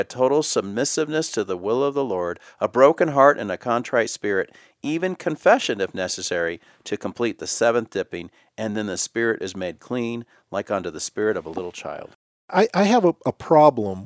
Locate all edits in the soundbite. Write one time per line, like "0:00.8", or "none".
none